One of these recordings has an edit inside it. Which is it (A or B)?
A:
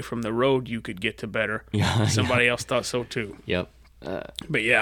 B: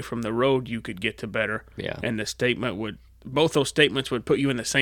A